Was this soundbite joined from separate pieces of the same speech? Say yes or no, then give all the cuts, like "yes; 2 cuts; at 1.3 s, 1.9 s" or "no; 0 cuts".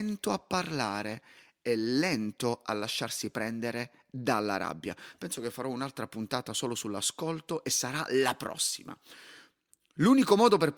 no; 0 cuts